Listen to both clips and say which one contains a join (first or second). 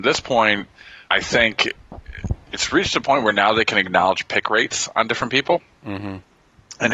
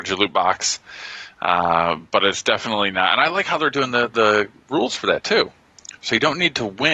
first